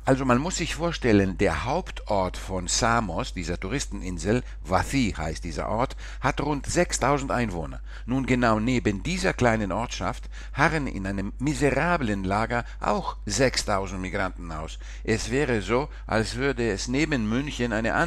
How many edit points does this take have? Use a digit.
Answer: 0